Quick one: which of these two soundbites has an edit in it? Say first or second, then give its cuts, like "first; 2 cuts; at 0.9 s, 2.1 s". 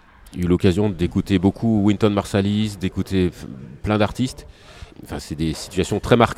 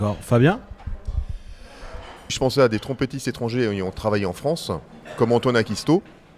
first; 1 cut; at 4.9 s